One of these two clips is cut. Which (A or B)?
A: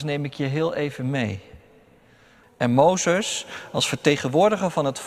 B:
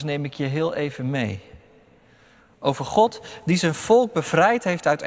A